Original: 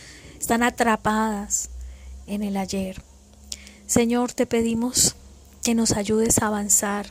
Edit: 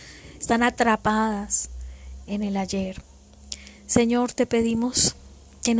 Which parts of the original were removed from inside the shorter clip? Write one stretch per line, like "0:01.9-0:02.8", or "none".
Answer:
none